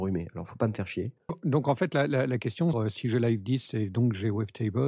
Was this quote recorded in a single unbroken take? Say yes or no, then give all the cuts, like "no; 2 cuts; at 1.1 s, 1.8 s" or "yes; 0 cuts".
no; 2 cuts; at 1.3 s, 2.7 s